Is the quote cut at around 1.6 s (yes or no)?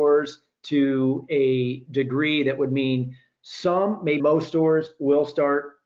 no